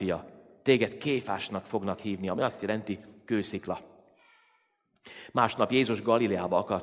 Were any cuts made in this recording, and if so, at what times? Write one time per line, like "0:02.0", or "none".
none